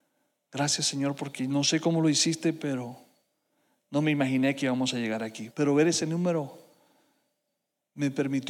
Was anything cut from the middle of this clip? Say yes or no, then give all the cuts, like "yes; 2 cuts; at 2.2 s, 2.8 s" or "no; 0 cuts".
yes; 1 cut; at 5.5 s